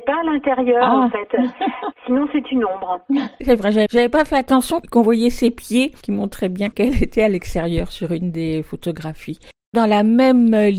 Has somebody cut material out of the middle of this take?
yes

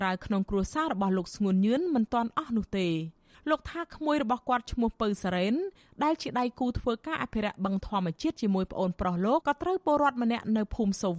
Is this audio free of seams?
no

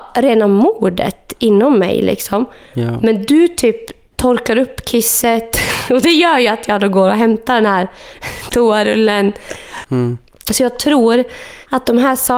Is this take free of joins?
no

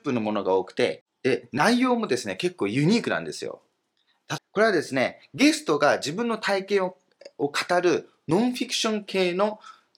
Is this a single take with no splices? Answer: no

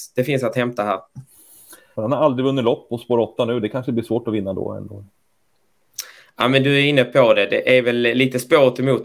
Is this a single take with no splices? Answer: no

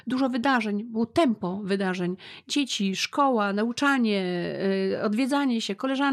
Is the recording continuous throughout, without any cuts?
yes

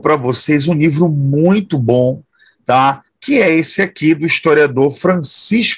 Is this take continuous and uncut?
yes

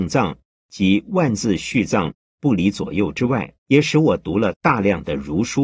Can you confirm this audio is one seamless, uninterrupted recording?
no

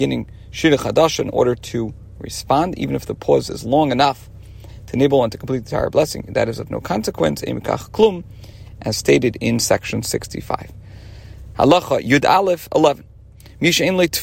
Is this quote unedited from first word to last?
yes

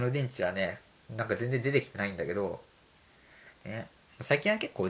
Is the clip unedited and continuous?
yes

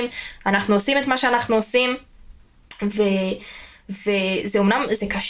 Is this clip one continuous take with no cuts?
yes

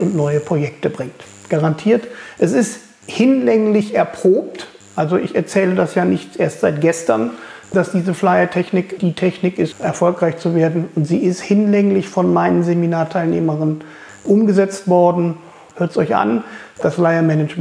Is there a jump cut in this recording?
yes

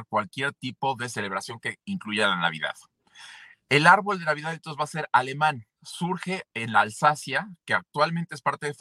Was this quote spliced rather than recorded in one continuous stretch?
no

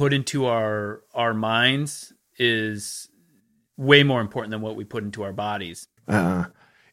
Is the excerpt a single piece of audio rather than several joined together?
no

